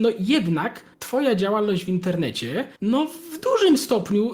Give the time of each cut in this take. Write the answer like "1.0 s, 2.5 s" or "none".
0.9 s, 2.8 s